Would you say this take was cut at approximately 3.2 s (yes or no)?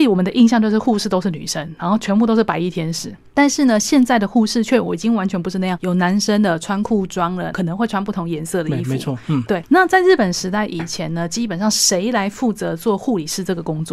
no